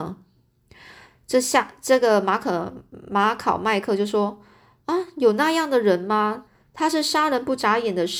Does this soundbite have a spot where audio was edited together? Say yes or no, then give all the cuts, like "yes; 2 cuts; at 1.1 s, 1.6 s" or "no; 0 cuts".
yes; 1 cut; at 6.5 s